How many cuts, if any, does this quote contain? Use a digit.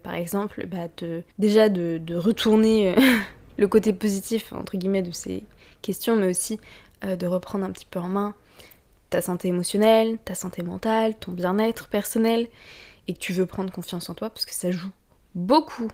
1